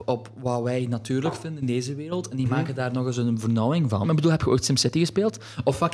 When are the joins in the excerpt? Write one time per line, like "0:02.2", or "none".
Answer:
0:04.0